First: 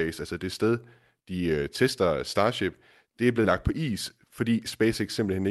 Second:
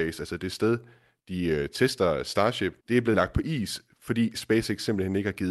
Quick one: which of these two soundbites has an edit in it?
second; 1 cut; at 2.8 s

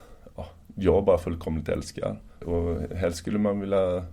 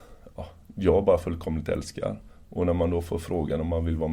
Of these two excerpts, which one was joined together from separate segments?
first; 1 cut; at 2.4 s

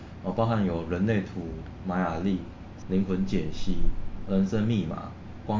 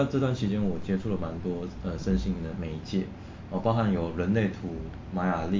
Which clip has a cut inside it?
first; 1 cut; at 2.8 s

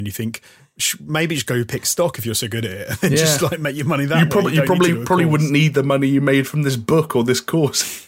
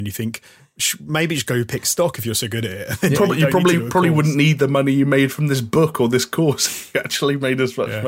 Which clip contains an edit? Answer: second; 1 cut; at 3.1 s

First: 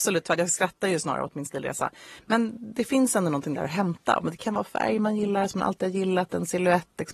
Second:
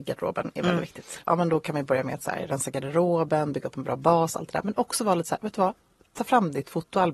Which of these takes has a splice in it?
second; 1 cut; at 1.2 s

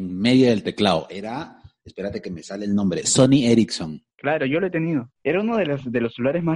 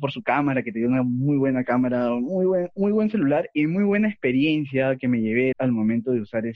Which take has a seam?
second; 1 cut; at 5.5 s

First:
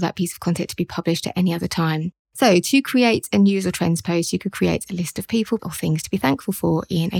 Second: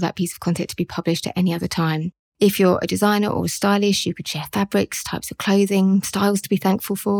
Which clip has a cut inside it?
first; 2 cuts; at 2.2 s, 5.6 s

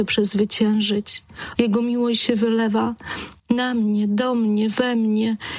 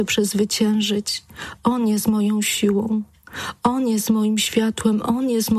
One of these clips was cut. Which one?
first; 2 cuts; at 1.6 s, 3.4 s

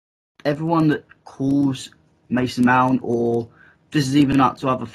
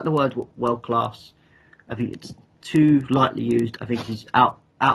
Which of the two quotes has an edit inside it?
second; 1 cut; at 3.8 s

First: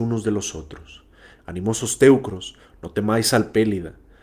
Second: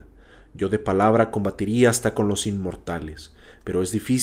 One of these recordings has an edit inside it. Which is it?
first; 1 cut; at 1.4 s

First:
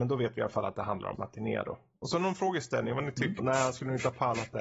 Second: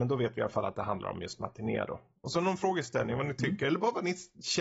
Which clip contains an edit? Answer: first; 2 cuts; at 1.1 s, 3.4 s

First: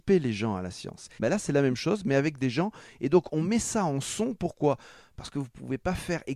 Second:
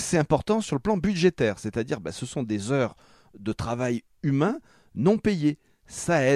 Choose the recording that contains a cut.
first; 1 cut; at 1.2 s

